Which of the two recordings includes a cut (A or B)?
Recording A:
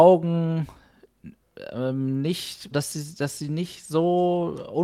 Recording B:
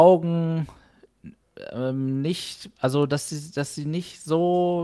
A